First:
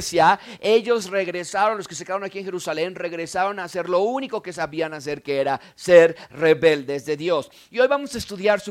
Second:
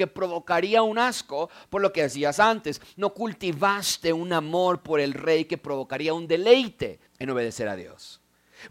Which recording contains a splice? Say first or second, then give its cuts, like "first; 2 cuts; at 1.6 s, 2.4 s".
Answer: second; 1 cut; at 7.1 s